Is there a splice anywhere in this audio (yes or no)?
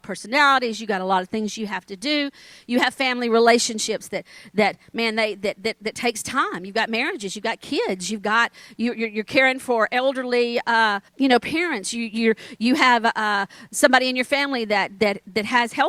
yes